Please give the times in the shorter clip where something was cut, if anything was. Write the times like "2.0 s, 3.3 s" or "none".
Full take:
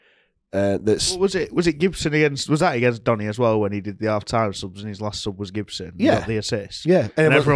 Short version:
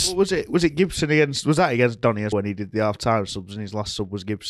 2.3 s